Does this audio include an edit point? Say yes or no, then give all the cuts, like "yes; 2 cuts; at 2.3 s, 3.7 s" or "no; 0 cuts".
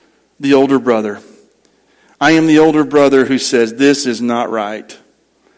no; 0 cuts